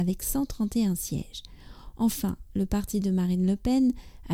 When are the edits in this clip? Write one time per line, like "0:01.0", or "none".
none